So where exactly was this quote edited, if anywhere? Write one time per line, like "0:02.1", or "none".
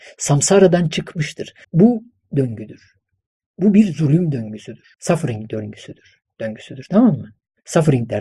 0:01.6
0:04.9